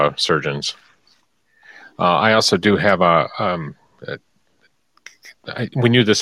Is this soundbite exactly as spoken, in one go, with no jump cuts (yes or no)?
yes